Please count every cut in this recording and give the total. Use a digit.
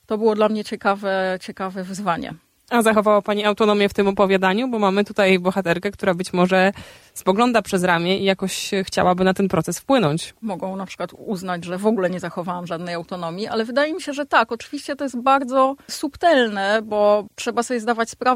1